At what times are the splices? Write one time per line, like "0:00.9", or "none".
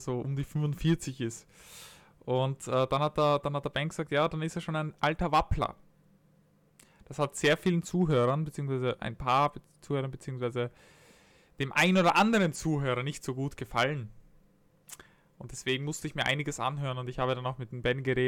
none